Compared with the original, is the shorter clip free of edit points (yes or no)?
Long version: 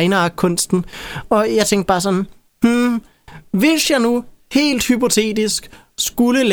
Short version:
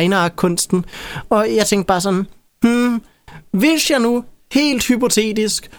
yes